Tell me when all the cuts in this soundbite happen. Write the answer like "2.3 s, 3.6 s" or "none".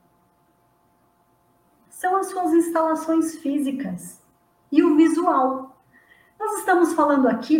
none